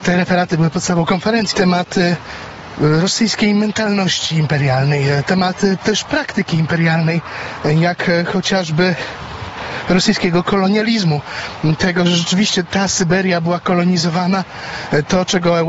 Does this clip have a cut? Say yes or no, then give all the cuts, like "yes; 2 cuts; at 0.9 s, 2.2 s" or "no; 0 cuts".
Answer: yes; 1 cut; at 1.5 s